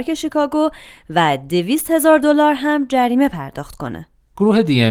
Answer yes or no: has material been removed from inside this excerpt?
no